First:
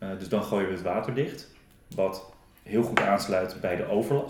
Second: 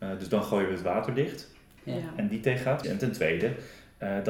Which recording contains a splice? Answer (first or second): second